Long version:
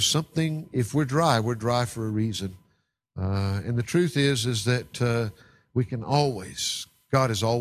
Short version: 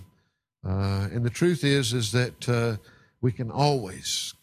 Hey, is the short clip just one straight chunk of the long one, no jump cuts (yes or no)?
yes